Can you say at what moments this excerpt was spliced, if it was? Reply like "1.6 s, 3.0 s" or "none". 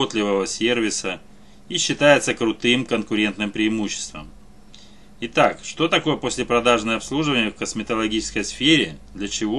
none